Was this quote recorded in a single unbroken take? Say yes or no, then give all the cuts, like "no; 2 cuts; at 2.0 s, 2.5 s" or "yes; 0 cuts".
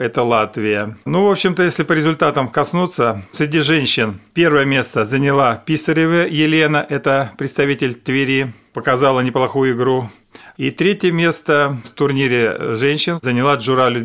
no; 2 cuts; at 1.0 s, 10.5 s